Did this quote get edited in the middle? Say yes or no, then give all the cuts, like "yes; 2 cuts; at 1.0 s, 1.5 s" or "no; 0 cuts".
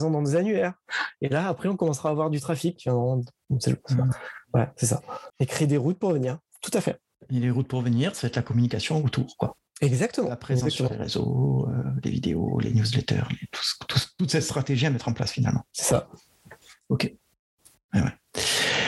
yes; 2 cuts; at 2.8 s, 5.3 s